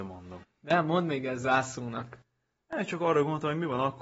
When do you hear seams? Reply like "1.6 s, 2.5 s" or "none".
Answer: none